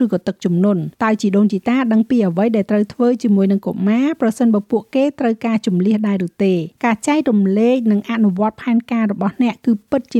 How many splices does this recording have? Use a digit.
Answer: 2